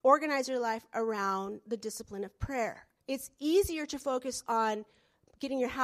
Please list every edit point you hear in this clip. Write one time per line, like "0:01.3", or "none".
0:03.0